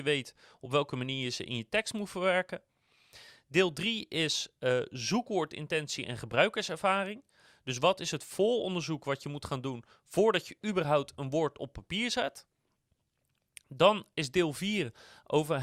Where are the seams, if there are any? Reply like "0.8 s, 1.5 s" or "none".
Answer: none